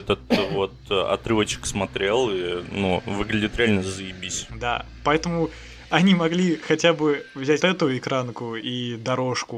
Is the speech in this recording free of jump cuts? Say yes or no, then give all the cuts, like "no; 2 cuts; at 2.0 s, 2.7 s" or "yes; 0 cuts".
no; 2 cuts; at 4.5 s, 7.6 s